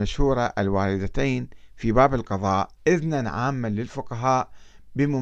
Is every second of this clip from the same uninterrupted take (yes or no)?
no